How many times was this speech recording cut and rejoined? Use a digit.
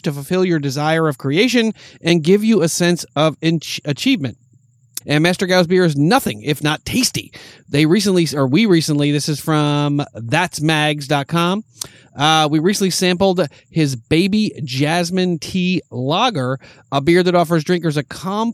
1